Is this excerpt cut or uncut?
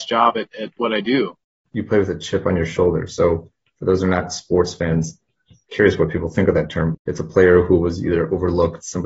cut